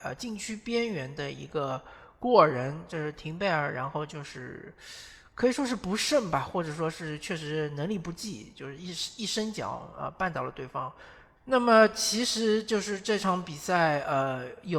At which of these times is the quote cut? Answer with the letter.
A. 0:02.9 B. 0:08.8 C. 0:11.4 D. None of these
C